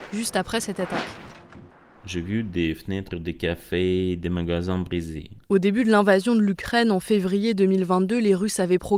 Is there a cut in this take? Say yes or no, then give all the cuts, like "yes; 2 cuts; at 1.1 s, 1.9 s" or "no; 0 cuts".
yes; 1 cut; at 5.4 s